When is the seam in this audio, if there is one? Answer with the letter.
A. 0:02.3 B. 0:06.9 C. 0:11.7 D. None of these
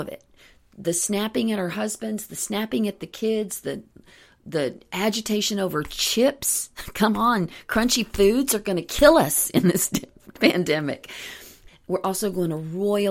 C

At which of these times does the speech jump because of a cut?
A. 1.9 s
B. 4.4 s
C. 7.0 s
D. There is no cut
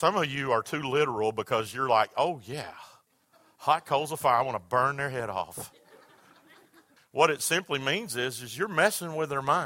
C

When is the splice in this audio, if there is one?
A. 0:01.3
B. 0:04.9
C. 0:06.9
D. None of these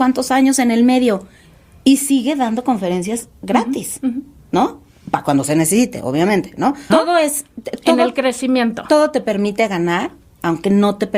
C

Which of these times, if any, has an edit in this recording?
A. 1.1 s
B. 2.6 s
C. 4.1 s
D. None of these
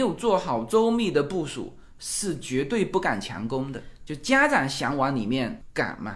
C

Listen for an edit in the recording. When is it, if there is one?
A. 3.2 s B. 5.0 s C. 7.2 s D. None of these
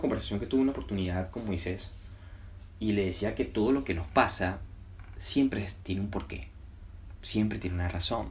D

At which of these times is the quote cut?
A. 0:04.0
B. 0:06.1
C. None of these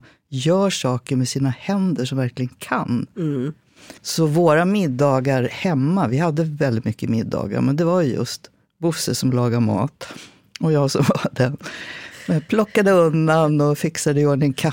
A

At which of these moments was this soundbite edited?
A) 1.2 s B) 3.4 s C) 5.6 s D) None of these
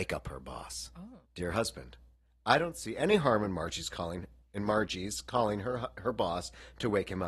A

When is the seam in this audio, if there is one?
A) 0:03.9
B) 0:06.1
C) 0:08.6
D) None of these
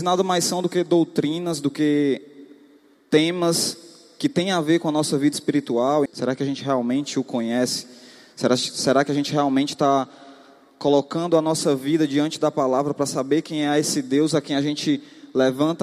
B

